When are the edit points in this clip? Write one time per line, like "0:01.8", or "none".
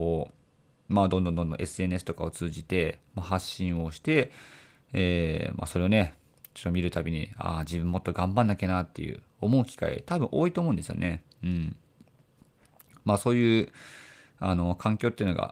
none